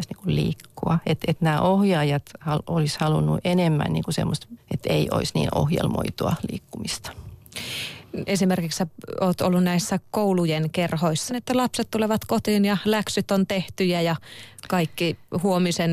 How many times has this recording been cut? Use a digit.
3